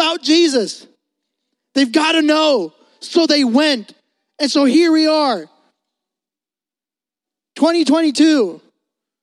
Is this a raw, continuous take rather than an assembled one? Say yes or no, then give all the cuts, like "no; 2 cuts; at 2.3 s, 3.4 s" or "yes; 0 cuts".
yes; 0 cuts